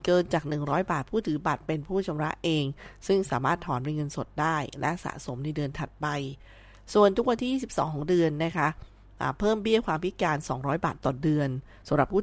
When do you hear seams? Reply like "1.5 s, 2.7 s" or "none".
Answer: none